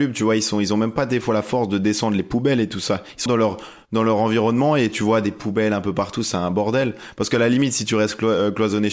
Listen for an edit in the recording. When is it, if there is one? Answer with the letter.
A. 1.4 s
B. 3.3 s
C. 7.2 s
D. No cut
B